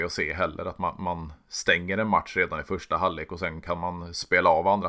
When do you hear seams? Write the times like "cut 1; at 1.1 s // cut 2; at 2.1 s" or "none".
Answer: none